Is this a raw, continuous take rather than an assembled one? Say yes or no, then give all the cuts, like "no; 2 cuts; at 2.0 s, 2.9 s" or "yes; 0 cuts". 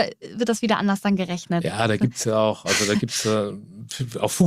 yes; 0 cuts